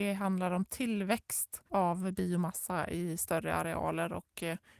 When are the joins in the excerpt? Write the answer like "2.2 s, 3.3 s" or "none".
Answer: 1.7 s